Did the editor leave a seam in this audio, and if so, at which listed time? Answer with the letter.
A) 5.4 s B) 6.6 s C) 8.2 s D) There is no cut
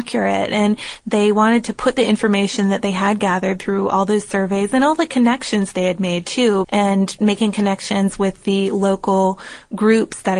B